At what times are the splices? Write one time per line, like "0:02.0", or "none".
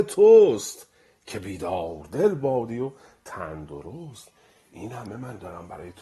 none